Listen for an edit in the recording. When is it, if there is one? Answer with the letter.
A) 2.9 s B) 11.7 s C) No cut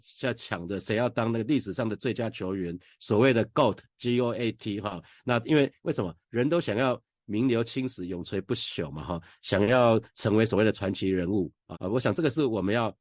B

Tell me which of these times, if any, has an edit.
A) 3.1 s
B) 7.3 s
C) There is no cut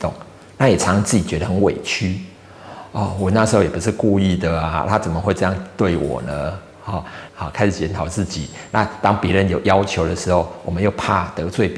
B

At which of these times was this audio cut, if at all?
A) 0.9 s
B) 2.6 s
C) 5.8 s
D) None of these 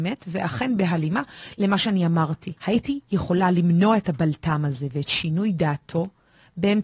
B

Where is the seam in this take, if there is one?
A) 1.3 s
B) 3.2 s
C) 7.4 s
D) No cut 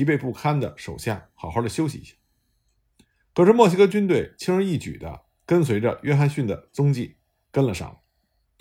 D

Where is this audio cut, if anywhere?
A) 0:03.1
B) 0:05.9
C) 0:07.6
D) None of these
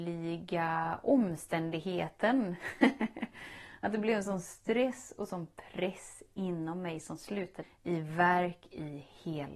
C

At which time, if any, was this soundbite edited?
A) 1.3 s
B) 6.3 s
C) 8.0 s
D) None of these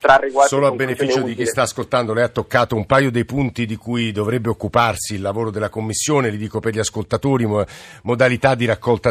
D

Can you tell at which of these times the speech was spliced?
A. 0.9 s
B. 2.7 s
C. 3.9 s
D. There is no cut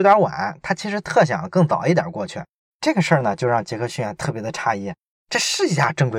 B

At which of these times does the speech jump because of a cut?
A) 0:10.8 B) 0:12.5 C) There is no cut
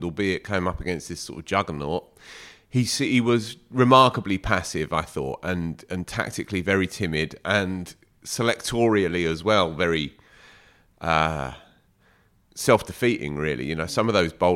C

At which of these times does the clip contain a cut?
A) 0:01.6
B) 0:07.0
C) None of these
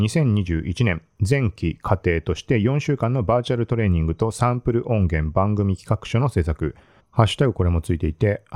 B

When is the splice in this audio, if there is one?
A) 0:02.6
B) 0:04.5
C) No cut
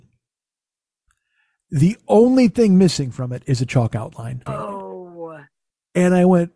B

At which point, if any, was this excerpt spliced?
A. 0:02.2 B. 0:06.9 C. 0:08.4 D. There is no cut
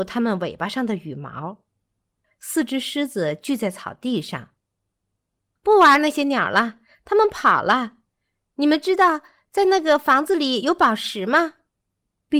A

